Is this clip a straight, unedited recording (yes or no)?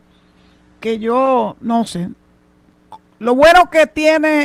yes